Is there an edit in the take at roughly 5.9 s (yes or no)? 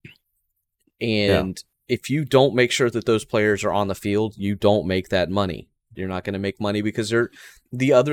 yes